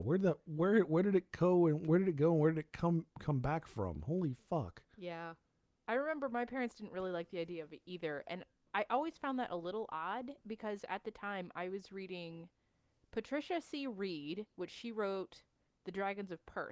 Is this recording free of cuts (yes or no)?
yes